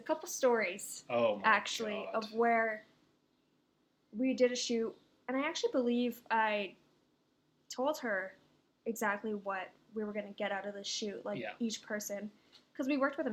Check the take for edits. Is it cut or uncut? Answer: uncut